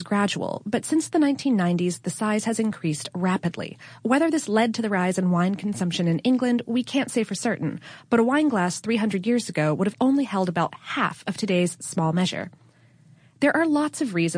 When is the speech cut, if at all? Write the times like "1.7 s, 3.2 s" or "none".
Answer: none